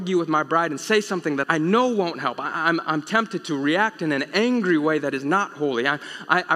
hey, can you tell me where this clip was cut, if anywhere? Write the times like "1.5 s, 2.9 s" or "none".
1.4 s